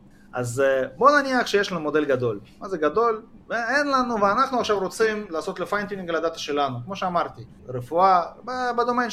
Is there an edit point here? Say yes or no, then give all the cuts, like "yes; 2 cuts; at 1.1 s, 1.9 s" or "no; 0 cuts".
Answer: yes; 2 cuts; at 3.4 s, 7.6 s